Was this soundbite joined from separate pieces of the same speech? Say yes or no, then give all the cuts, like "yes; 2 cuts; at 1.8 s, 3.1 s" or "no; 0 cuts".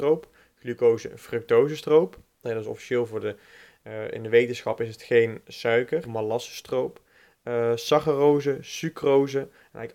yes; 2 cuts; at 2.4 s, 6.0 s